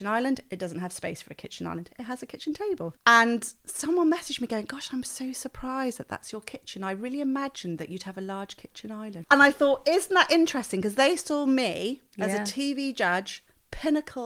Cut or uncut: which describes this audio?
cut